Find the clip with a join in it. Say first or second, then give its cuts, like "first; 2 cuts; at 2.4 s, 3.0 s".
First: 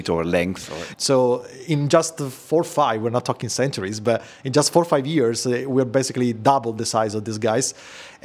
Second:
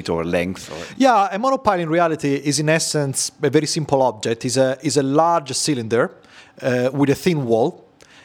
first; 1 cut; at 0.9 s